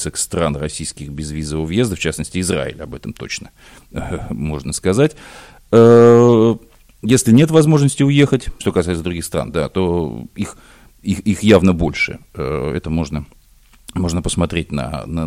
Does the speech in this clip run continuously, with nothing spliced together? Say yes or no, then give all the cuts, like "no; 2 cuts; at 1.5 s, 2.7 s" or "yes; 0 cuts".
no; 1 cut; at 8.6 s